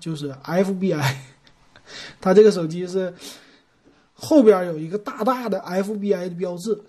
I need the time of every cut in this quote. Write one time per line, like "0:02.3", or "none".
none